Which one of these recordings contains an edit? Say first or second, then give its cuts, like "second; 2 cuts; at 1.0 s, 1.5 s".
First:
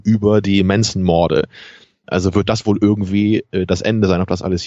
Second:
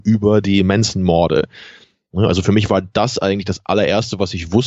first; 1 cut; at 2.0 s